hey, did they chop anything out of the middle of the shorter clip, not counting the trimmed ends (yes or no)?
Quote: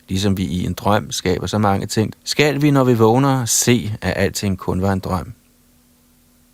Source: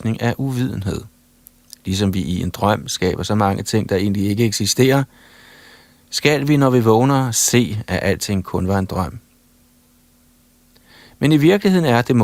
yes